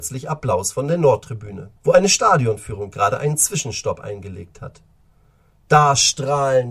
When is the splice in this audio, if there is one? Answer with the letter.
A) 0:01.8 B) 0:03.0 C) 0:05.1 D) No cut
A